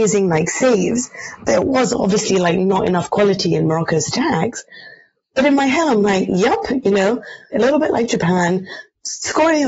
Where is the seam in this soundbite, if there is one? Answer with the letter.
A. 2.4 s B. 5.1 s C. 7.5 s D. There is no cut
C